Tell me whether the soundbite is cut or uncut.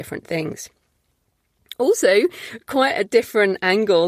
uncut